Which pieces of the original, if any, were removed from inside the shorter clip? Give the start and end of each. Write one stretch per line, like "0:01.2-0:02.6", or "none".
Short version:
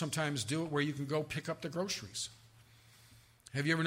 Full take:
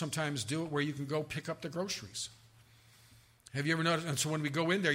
none